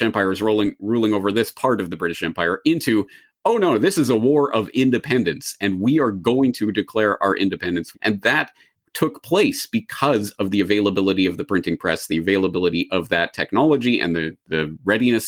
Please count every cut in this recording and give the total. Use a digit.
1